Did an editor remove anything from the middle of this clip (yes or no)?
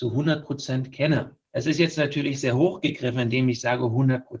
no